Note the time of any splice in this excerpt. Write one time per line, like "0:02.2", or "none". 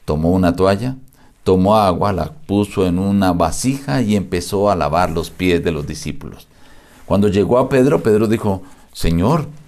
none